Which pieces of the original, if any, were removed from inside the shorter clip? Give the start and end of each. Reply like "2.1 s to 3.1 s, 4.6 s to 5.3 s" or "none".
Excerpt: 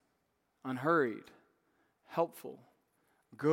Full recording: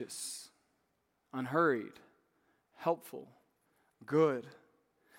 none